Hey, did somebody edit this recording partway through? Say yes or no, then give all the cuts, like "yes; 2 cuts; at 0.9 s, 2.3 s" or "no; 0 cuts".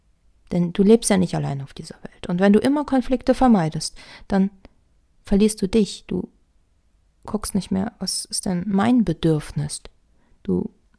no; 0 cuts